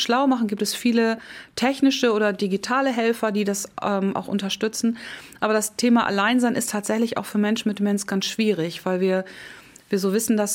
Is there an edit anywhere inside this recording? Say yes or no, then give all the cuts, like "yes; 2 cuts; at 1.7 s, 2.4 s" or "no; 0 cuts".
no; 0 cuts